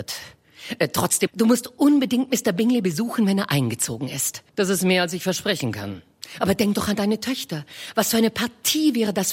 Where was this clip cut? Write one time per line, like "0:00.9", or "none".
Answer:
0:01.3
0:04.5